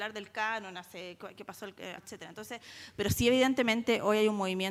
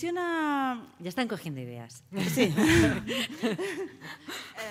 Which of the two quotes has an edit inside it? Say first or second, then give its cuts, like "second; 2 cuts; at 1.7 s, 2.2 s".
first; 1 cut; at 2.0 s